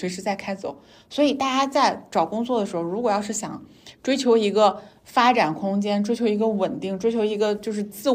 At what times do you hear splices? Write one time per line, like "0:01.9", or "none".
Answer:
none